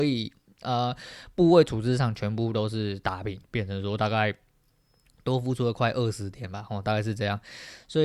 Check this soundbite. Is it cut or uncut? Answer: cut